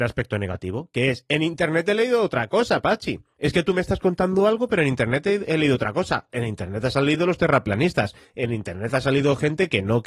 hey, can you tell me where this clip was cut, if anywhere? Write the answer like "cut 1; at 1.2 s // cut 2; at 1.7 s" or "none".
cut 1; at 6.3 s